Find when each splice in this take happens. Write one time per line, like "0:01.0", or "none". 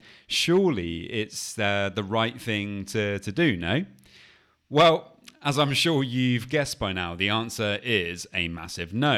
none